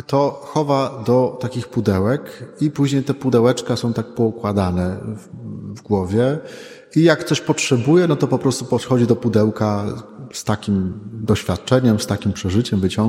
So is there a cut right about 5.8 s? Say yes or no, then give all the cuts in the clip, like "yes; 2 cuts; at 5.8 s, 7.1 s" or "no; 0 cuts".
no; 0 cuts